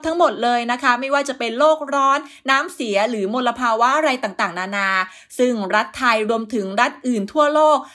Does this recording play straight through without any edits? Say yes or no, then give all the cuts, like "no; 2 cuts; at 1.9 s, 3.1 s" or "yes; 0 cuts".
yes; 0 cuts